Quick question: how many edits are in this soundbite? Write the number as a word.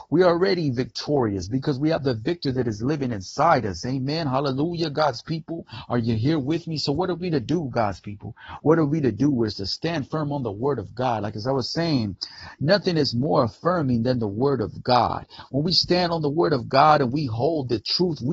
zero